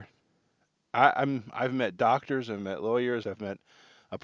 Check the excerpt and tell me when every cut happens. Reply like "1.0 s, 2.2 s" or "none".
3.2 s

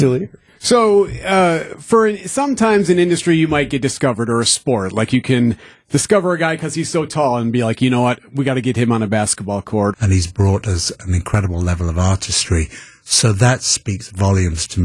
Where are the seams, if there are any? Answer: 9.9 s

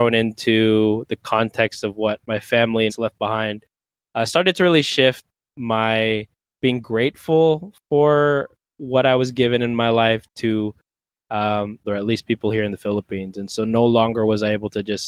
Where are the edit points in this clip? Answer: 2.9 s, 5.5 s, 11.8 s

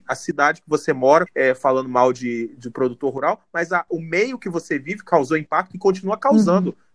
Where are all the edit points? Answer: 1.3 s

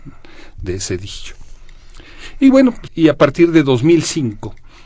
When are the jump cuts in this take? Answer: 2.9 s

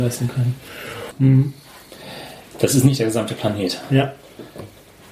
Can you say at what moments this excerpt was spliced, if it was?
1.1 s

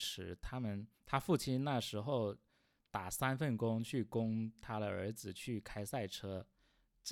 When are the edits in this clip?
0.9 s

